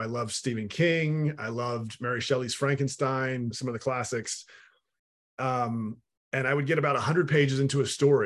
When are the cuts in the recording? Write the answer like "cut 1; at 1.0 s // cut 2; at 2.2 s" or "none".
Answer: cut 1; at 3.5 s